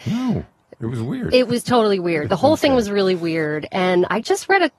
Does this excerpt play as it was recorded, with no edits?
no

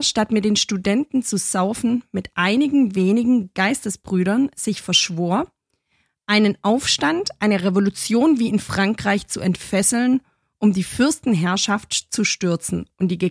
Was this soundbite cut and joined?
no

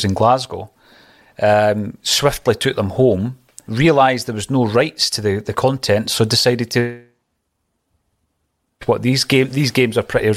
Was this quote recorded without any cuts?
no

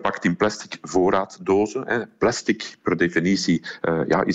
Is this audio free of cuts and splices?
yes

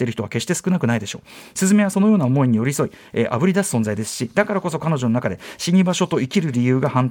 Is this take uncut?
yes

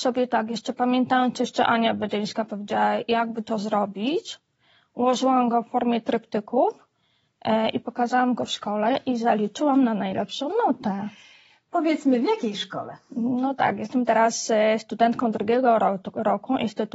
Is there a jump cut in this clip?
no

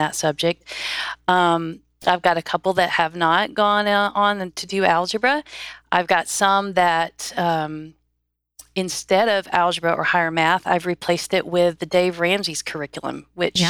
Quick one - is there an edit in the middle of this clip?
no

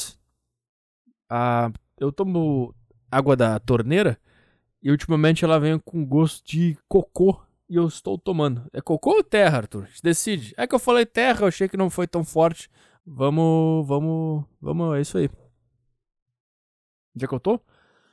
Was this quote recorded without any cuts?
no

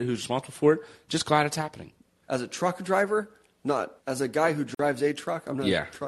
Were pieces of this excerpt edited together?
yes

